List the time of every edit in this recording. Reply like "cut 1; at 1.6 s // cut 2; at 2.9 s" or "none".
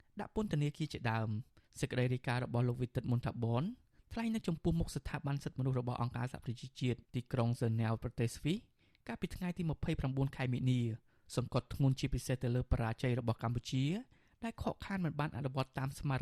cut 1; at 7.0 s